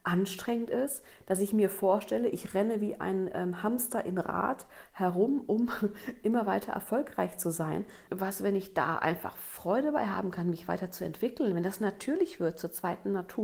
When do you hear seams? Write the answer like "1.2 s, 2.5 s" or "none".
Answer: 8.1 s